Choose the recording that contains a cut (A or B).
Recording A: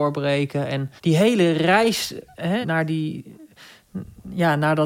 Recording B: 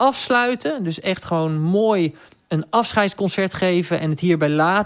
A